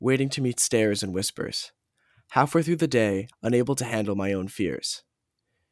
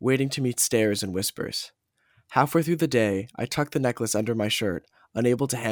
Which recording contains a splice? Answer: first; 1 cut; at 3.3 s

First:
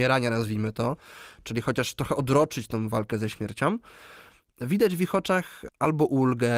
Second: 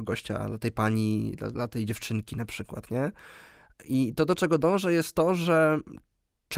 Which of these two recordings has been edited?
first; 1 cut; at 5.7 s

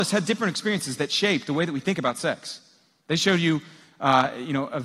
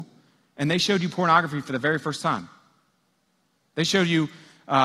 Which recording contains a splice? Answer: first; 1 cut; at 3.0 s

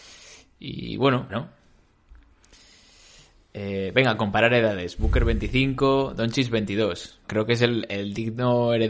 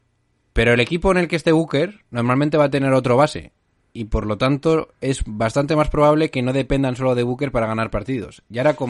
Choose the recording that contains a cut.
first; 2 cuts; at 1.3 s, 7.2 s

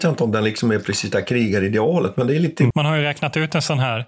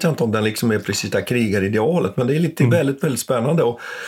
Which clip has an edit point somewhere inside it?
first; 1 cut; at 2.7 s

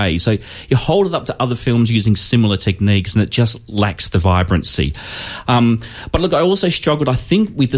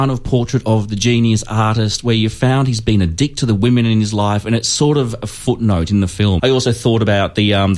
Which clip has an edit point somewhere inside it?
second; 1 cut; at 6.4 s

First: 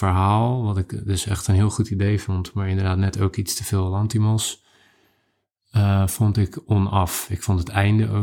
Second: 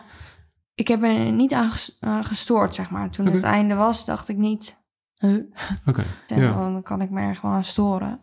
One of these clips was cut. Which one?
second; 1 cut; at 6.3 s

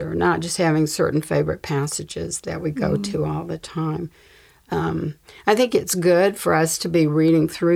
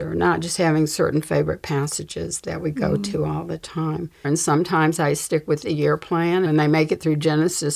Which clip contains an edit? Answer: second; 2 cuts; at 4.2 s, 6.5 s

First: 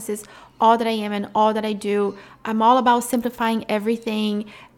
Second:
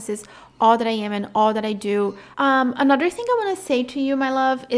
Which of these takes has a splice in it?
second; 1 cut; at 2.3 s

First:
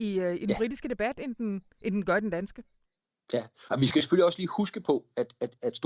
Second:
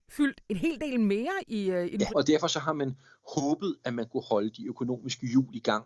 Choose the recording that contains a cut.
second; 1 cut; at 2.1 s

